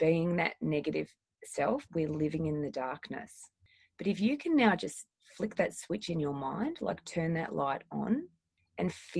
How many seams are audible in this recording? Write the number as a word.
one